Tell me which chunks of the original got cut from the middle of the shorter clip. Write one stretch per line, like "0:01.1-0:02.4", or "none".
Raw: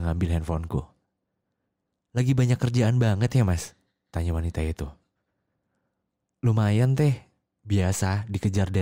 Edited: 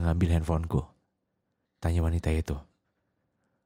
0:01.7-0:04.0